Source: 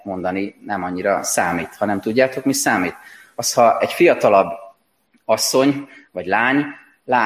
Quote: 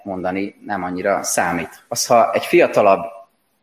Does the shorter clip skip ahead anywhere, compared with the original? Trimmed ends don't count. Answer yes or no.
yes